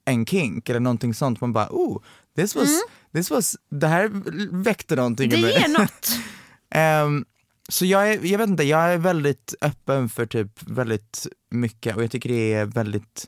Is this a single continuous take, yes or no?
yes